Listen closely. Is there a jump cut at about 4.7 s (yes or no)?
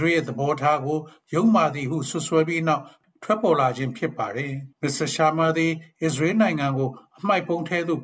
yes